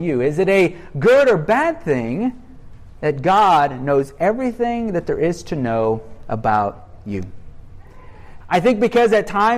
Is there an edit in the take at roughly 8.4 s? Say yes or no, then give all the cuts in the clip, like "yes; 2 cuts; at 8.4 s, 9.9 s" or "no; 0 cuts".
yes; 1 cut; at 8.4 s